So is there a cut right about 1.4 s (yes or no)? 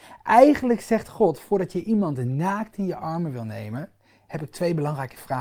no